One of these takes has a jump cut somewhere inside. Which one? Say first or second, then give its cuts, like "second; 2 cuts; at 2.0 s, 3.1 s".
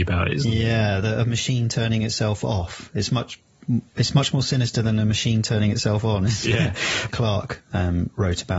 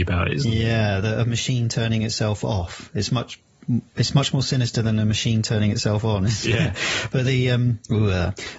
first; 1 cut; at 7.1 s